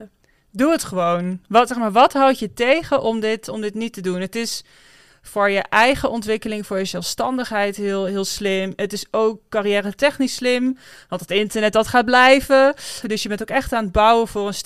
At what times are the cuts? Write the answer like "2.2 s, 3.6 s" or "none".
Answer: 13.0 s